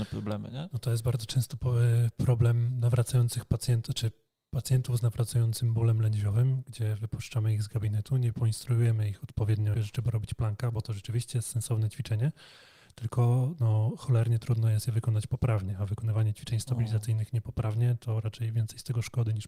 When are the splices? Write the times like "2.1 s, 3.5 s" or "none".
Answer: 9.7 s